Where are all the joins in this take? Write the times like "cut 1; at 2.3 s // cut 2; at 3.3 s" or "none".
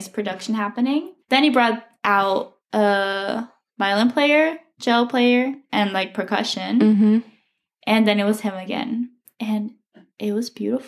cut 1; at 1.2 s // cut 2; at 2.6 s